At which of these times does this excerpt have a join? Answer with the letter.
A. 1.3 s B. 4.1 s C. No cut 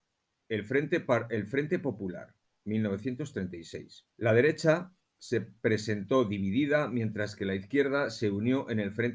B